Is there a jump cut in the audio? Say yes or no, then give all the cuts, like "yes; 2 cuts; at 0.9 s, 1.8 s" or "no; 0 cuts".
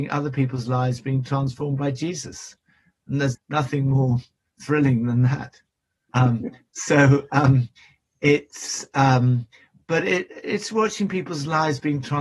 yes; 2 cuts; at 3.3 s, 6.1 s